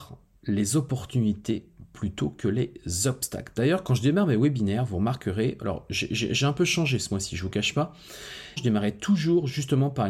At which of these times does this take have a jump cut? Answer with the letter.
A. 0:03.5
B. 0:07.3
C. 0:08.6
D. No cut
C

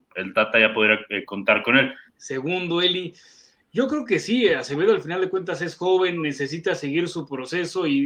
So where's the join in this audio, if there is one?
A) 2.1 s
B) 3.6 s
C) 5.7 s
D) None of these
A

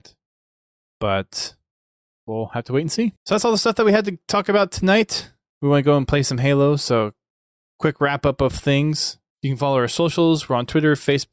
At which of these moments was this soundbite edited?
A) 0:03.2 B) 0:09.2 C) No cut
A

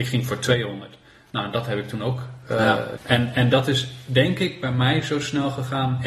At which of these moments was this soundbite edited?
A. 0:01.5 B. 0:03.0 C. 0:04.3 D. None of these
B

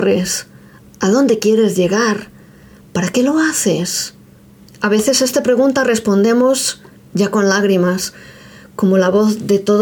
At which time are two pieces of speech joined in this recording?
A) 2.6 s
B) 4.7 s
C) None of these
B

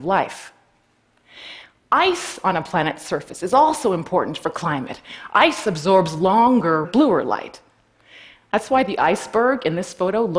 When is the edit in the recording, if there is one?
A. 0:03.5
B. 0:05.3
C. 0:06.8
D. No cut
C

